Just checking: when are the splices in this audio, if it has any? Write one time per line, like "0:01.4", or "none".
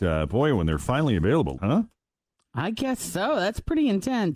0:01.6